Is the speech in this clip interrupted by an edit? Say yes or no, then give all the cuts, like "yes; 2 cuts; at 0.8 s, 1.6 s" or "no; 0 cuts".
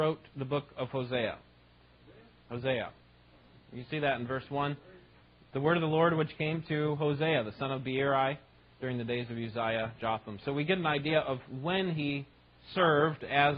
no; 0 cuts